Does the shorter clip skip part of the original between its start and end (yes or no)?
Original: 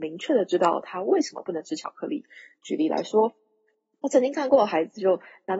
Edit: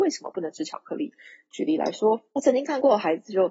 yes